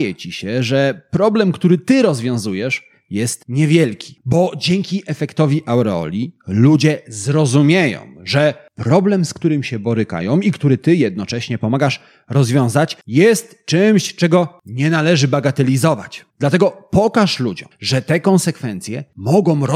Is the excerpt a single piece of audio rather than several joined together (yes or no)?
no